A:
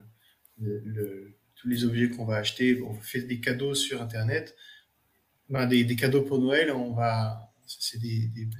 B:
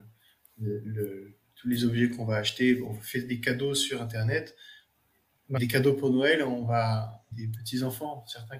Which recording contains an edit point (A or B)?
B